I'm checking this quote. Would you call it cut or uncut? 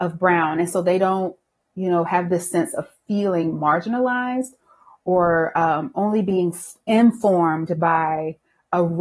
uncut